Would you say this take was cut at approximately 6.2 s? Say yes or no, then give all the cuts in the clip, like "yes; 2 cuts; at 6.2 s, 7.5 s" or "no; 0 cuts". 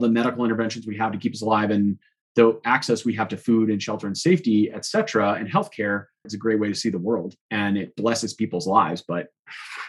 yes; 2 cuts; at 6.2 s, 7.4 s